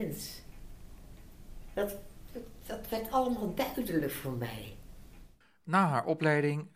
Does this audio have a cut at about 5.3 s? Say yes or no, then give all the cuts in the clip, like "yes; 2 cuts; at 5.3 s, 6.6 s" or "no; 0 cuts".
no; 0 cuts